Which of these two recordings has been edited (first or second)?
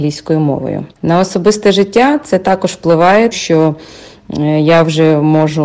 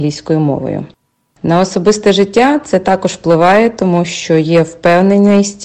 first